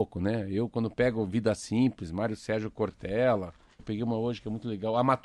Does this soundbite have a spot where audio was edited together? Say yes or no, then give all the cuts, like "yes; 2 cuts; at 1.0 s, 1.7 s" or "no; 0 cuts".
yes; 1 cut; at 3.8 s